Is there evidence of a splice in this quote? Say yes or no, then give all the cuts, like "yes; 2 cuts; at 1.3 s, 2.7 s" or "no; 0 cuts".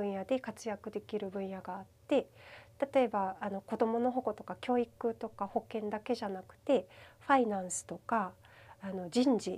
no; 0 cuts